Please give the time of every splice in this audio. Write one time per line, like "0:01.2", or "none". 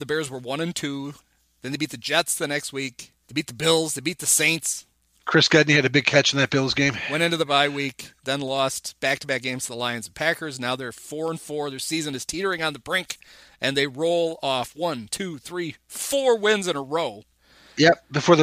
0:03.2

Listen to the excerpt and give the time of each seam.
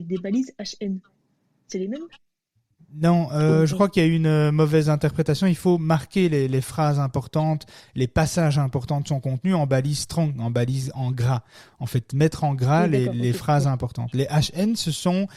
none

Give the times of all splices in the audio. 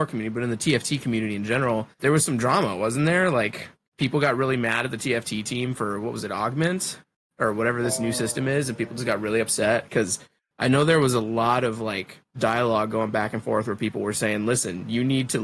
0:02.0

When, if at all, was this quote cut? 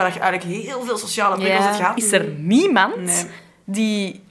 0:02.0

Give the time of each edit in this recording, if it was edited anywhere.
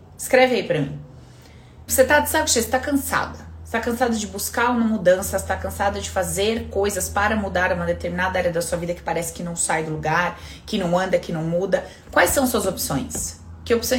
0:01.9

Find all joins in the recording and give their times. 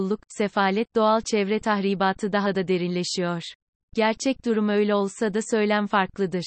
0:03.8

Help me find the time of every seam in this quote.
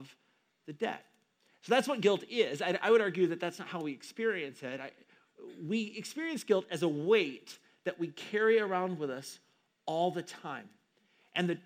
none

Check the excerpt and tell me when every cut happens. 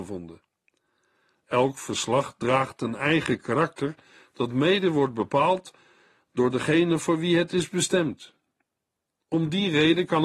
none

